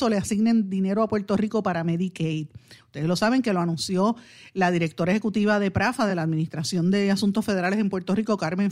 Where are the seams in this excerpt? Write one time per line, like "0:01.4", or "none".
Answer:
none